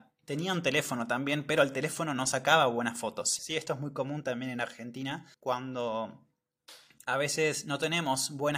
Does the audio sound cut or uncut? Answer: cut